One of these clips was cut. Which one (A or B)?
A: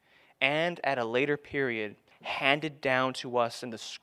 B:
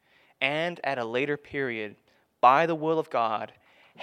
A